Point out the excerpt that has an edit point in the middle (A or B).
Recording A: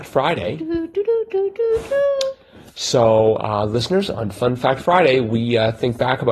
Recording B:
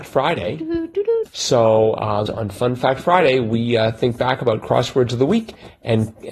B